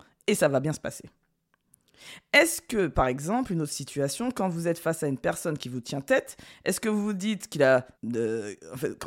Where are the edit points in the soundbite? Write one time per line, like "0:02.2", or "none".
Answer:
0:07.9